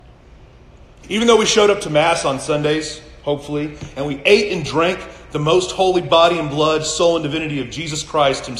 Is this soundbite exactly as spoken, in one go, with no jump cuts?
no; 1 cut; at 1.0 s

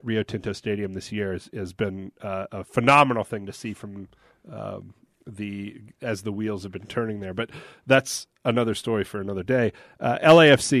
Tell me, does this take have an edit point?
no; 0 cuts

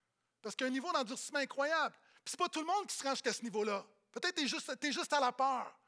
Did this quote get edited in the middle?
no; 0 cuts

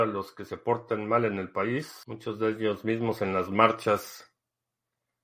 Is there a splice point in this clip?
no; 0 cuts

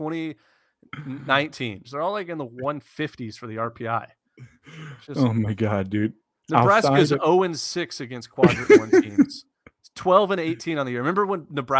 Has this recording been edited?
yes; 1 cut; at 1.8 s

